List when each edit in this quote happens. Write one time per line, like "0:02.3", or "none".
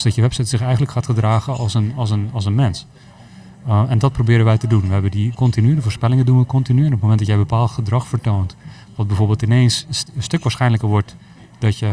0:05.3